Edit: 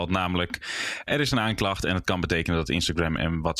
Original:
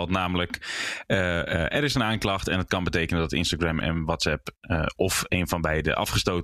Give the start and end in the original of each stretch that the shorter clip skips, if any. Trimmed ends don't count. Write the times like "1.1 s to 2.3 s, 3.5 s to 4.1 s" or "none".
1.1 s to 1.7 s